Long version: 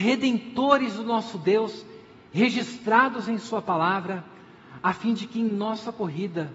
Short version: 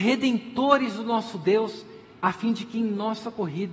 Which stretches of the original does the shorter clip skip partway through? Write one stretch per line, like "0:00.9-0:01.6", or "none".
0:02.2-0:04.8